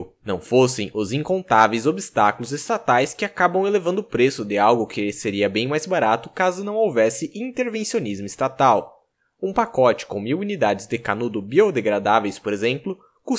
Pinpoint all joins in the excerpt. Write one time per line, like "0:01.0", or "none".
none